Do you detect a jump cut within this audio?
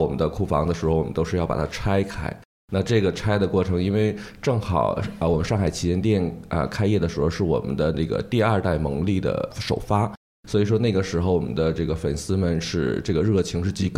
no; 0 cuts

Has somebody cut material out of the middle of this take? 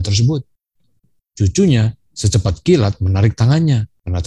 yes; 1 cut; at 2.1 s

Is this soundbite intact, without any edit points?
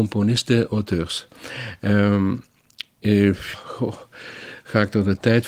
no; 1 cut; at 3.5 s

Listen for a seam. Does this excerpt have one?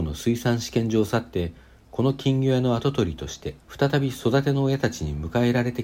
yes; 1 cut; at 3.6 s

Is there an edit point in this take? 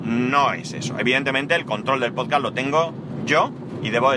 no; 0 cuts

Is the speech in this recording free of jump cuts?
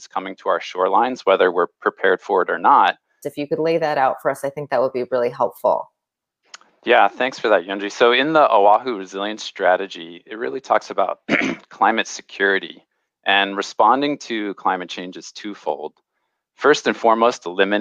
no; 1 cut; at 3.2 s

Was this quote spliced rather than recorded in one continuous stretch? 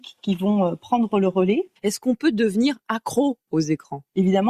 yes; 1 cut; at 1.8 s

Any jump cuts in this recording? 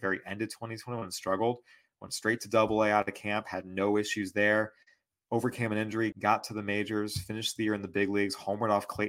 yes; 1 cut; at 6.1 s

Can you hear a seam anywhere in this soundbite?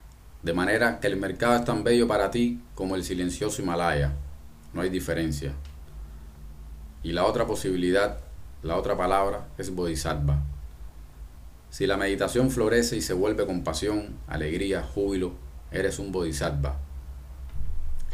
yes; 1 cut; at 7.0 s

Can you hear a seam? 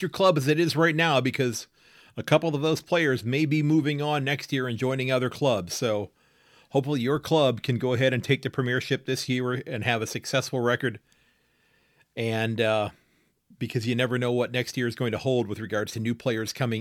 no; 0 cuts

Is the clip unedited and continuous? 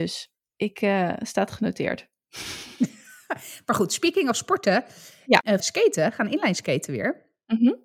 no; 1 cut; at 5.6 s

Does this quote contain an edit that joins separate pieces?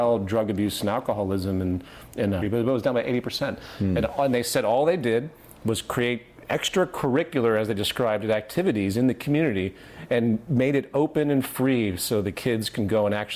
yes; 1 cut; at 2.4 s

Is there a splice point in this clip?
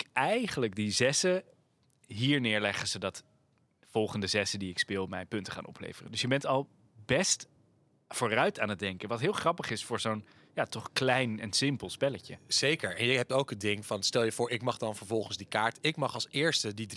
no; 0 cuts

